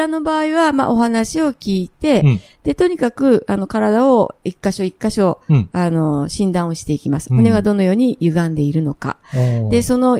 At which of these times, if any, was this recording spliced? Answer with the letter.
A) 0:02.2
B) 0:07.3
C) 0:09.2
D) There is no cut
D